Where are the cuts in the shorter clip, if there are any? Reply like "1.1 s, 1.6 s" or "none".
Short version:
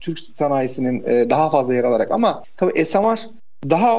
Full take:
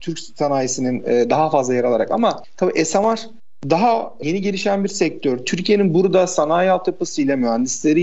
none